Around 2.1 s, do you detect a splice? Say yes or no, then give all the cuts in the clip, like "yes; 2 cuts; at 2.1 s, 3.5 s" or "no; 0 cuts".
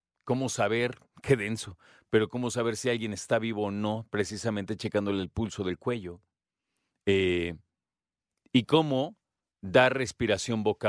no; 0 cuts